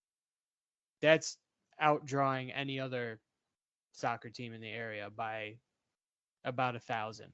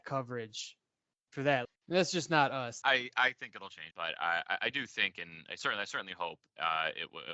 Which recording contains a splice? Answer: second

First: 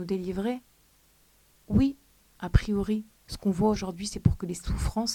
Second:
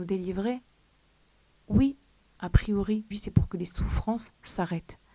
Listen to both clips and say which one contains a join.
second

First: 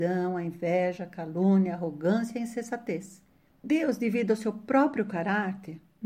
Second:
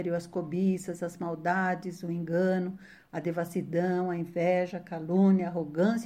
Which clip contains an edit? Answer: first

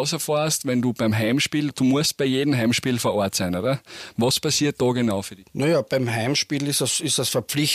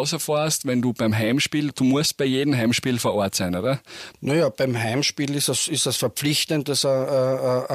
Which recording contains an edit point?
second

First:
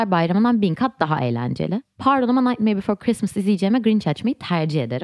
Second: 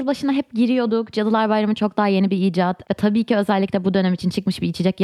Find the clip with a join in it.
second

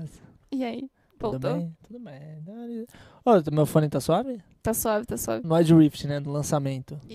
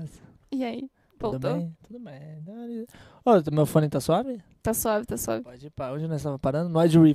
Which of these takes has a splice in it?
first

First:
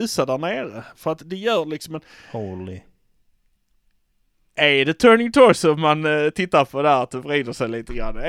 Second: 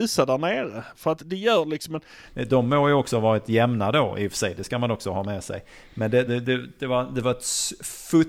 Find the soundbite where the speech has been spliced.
second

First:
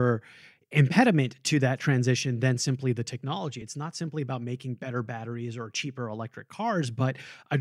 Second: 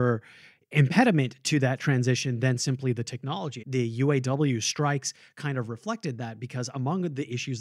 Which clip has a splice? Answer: second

